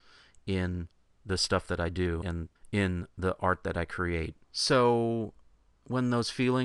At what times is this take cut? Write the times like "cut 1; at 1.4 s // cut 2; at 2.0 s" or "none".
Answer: cut 1; at 4.4 s